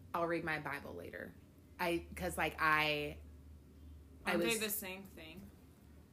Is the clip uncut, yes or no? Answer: no